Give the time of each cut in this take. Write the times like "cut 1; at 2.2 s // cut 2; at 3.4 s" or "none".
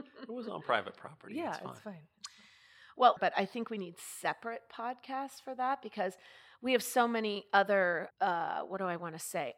cut 1; at 3.2 s // cut 2; at 8.1 s